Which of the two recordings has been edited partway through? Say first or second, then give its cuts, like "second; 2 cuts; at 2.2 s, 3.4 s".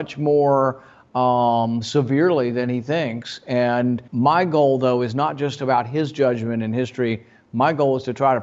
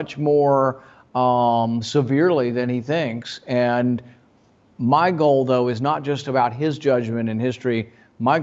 first; 1 cut; at 4.1 s